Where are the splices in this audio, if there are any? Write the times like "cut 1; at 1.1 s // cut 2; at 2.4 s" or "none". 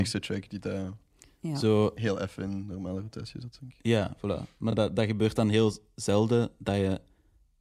none